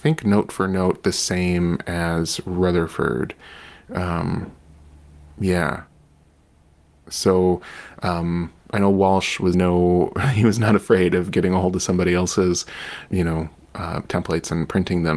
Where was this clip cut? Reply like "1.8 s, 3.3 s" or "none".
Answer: 9.5 s, 13.1 s